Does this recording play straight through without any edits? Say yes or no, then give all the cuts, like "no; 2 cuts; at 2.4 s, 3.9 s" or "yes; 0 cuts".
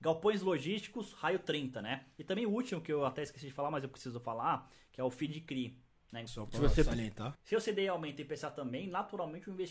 no; 2 cuts; at 6.3 s, 7.3 s